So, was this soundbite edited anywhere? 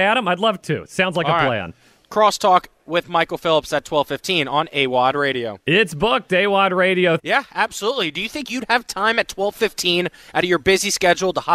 yes; 1 cut; at 7.2 s

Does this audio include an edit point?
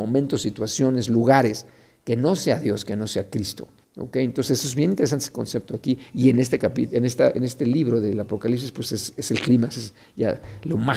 yes; 1 cut; at 3.8 s

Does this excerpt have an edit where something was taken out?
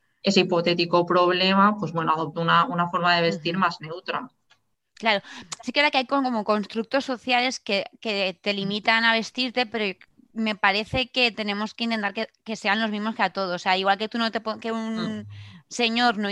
no; 0 cuts

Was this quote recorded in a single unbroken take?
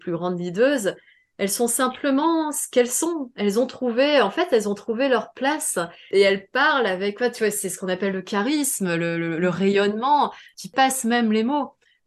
yes; 0 cuts

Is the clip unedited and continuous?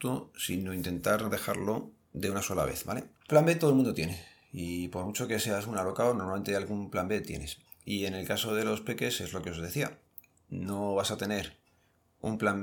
yes; 0 cuts

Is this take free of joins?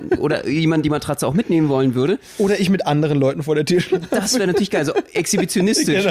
yes; 0 cuts

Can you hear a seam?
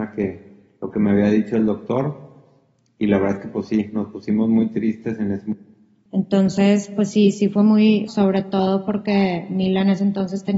yes; 2 cuts; at 6.1 s, 8.1 s

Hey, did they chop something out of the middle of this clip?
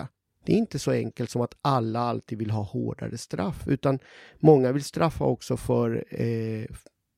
no; 0 cuts

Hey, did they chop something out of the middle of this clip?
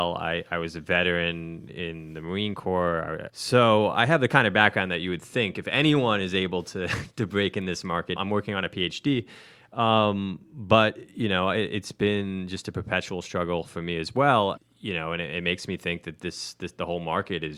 yes; 3 cuts; at 3.3 s, 8.2 s, 14.6 s

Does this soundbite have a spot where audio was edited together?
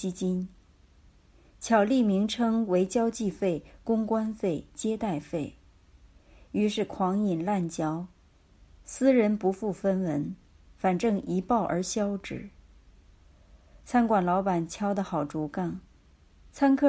no; 0 cuts

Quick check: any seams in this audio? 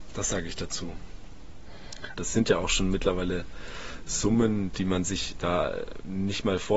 yes; 1 cut; at 2.2 s

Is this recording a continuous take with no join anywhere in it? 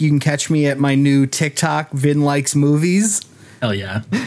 yes; 0 cuts

